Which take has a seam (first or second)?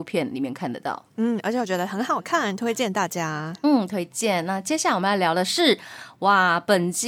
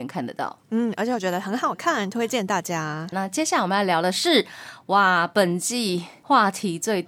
second